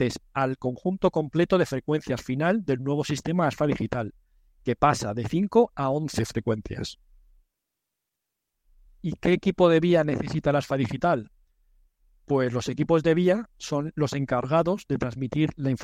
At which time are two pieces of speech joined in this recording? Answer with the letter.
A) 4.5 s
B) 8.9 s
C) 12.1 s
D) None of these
B